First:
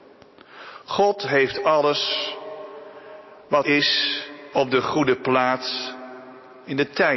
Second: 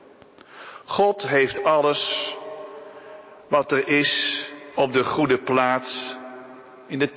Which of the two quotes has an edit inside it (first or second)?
first